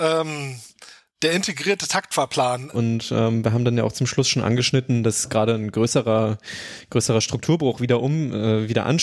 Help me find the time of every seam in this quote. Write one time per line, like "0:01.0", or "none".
0:02.7